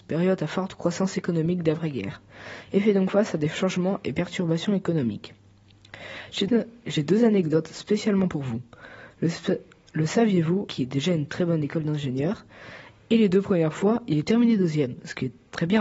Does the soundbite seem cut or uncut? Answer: cut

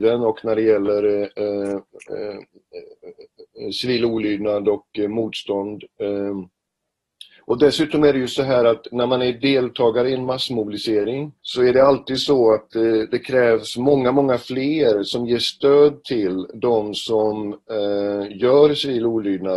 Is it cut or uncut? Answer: cut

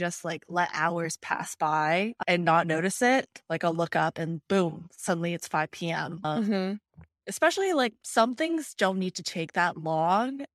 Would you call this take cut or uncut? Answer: cut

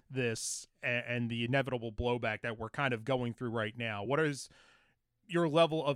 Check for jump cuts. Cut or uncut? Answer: uncut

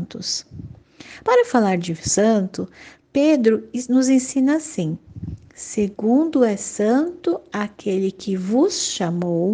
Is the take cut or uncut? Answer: uncut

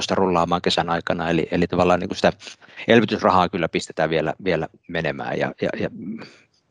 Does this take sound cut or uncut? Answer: uncut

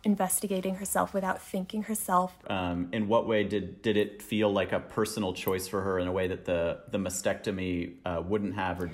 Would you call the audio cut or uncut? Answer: cut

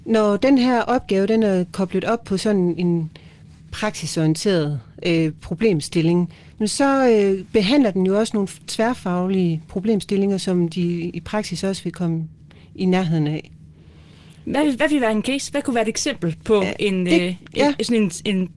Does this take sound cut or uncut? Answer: uncut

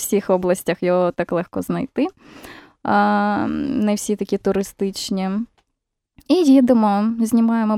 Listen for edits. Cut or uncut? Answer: uncut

